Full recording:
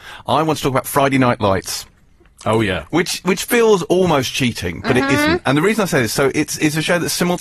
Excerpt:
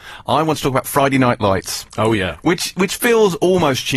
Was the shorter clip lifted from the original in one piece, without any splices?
no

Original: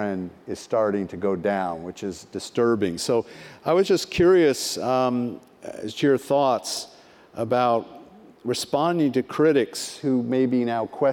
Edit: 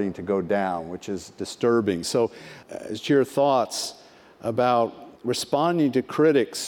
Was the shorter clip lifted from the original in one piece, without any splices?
no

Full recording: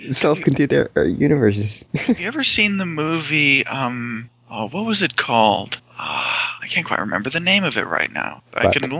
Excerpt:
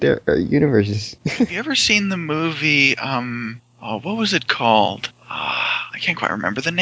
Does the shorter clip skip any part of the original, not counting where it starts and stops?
no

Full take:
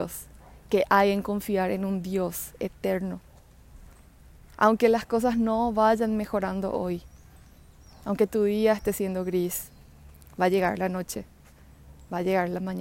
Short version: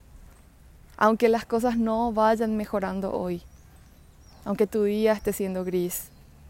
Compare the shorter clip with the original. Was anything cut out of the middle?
no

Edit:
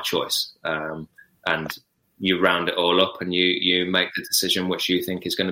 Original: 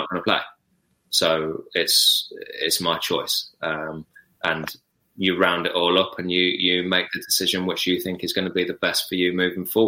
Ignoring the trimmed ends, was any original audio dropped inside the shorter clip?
no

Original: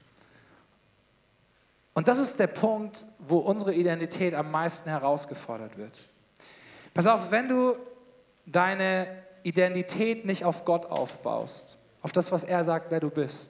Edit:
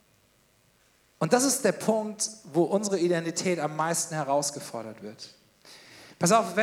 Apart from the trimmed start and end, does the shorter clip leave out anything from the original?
no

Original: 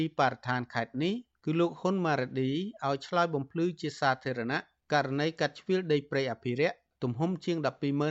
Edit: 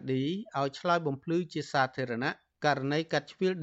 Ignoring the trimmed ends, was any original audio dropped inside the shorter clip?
no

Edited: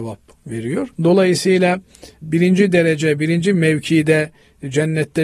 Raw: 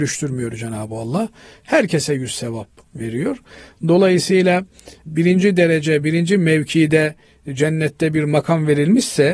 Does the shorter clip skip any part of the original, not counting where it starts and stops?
yes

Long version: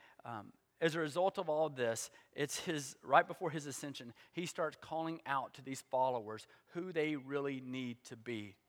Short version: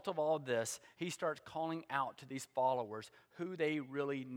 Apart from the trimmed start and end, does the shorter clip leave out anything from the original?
yes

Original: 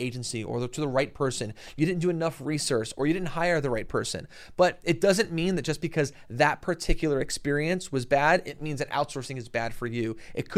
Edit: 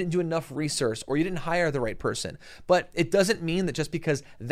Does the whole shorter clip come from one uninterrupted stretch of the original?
yes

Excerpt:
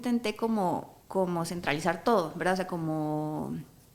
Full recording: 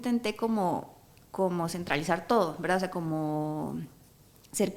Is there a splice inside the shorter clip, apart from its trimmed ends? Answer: yes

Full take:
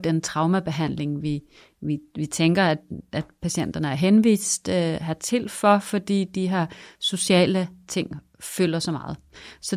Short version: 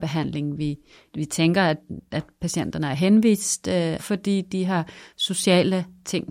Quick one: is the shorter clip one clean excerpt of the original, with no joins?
no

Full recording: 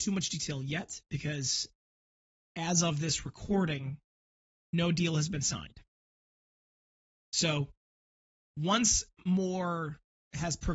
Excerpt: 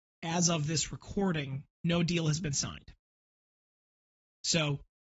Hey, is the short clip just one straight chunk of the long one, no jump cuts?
no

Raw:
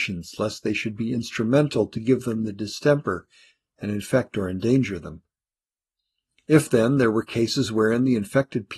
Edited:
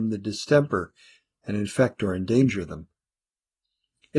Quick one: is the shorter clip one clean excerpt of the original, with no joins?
yes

